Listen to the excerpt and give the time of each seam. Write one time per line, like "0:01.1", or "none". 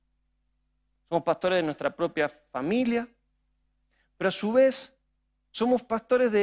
none